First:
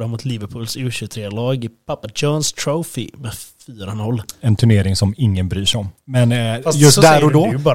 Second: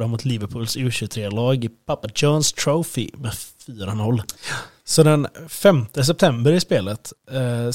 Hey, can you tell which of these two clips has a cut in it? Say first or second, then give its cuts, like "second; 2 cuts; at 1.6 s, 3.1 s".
second; 1 cut; at 4.4 s